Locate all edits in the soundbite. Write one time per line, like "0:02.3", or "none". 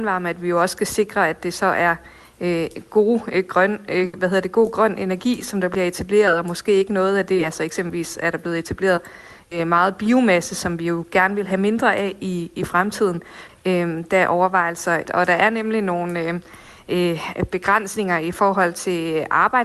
0:13.5
0:15.0